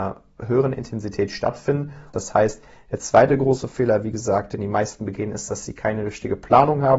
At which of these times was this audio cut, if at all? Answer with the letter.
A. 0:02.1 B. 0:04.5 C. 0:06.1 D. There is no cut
A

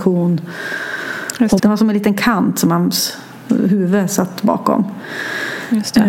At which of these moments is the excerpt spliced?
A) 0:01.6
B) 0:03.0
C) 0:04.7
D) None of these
A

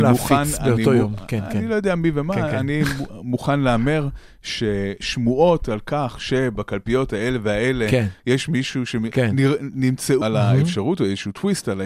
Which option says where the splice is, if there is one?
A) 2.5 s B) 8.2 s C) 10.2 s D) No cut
C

